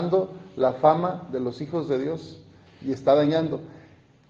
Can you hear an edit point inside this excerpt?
no; 0 cuts

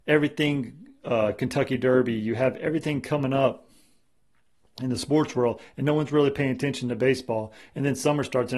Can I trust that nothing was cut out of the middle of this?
yes; 0 cuts

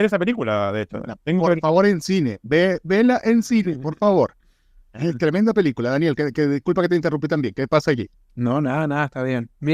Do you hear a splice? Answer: no; 0 cuts

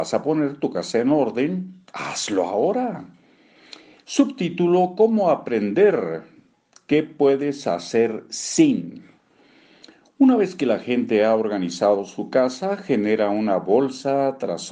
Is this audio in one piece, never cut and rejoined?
yes; 0 cuts

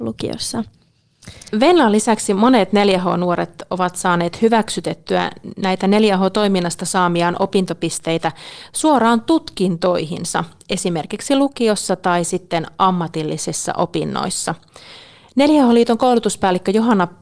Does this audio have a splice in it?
yes; 1 cut; at 1.5 s

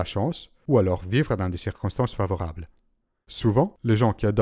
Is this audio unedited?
yes; 0 cuts

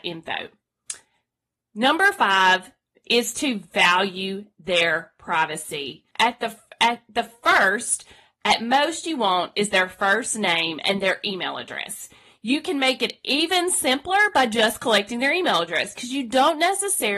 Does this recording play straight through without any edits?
no; 1 cut; at 6.1 s

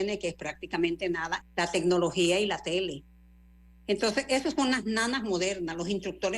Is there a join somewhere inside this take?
yes; 1 cut; at 1.4 s

